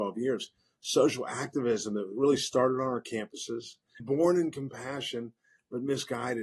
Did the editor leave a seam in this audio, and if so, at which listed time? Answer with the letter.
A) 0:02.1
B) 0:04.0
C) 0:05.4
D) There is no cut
B